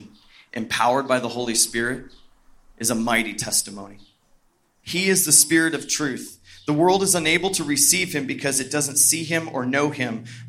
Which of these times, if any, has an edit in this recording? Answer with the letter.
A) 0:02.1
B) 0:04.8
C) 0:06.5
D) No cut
B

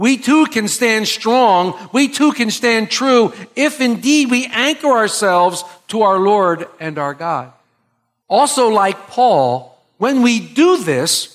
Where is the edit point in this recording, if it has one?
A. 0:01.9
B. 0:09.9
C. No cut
C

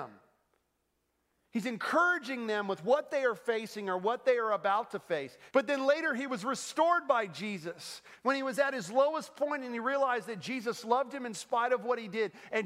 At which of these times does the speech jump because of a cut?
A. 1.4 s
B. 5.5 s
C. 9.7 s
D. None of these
B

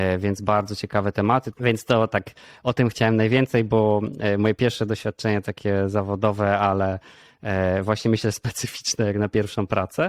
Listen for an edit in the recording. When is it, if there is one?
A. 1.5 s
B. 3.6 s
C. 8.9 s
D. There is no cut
A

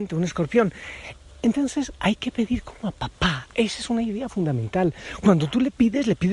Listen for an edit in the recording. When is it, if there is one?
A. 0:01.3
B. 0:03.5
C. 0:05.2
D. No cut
D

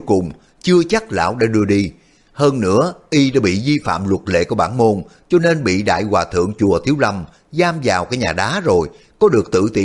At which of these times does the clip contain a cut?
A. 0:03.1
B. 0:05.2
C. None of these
C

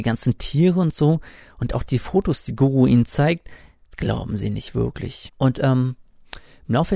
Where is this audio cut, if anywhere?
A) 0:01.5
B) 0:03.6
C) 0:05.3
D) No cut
C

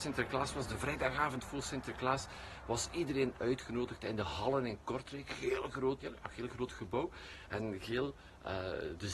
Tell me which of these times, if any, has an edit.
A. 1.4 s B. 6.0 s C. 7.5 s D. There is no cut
B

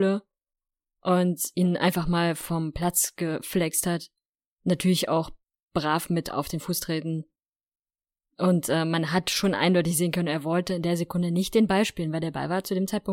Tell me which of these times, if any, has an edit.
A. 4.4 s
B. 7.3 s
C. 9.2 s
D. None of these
D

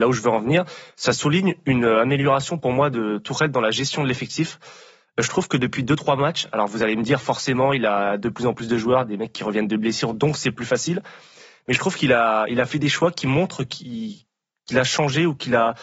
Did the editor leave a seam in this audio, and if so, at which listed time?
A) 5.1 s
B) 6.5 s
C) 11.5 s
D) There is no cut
D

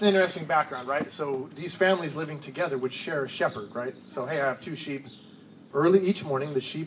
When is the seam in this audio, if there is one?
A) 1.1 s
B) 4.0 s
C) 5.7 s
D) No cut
C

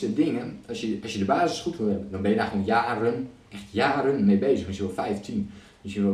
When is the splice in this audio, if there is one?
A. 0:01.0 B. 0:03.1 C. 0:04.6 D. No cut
D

